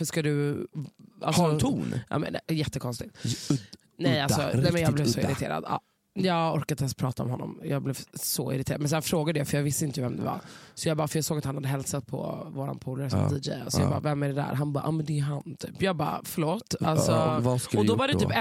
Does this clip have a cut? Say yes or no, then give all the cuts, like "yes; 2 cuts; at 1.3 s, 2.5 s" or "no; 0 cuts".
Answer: yes; 1 cut; at 15.8 s